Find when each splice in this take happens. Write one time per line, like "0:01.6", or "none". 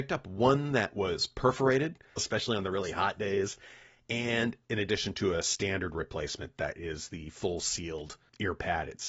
0:02.2